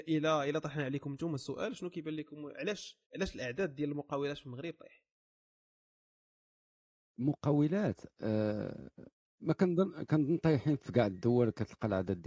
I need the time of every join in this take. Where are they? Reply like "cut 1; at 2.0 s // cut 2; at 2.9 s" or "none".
cut 1; at 3.0 s